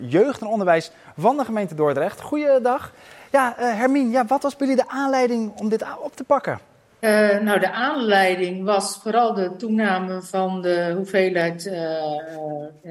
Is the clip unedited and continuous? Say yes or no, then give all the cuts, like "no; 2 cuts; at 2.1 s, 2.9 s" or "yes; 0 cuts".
yes; 0 cuts